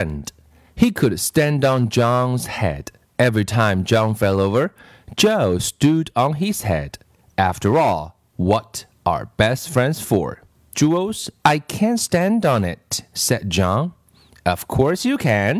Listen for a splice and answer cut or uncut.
cut